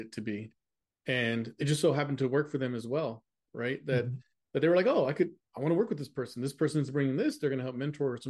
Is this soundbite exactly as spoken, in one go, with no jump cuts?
yes; 0 cuts

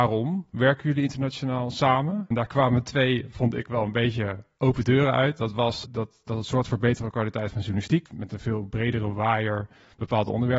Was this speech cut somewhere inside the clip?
yes; 2 cuts; at 5.8 s, 8.1 s

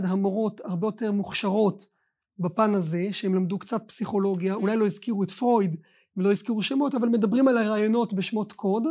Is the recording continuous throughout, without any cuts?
yes; 0 cuts

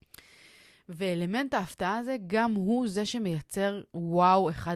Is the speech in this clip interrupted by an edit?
no; 0 cuts

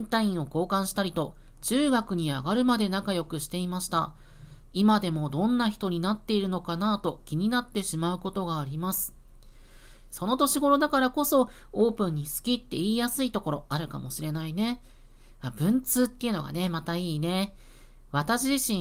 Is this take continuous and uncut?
no; 1 cut; at 10.1 s

